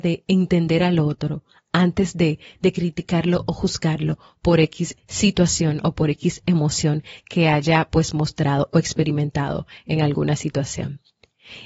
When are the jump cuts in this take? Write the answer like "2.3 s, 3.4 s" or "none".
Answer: none